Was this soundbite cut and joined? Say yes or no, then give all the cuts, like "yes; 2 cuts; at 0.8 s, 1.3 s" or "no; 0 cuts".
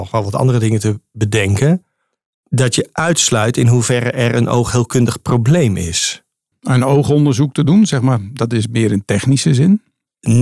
yes; 1 cut; at 6.5 s